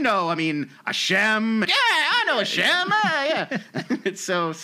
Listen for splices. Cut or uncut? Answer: cut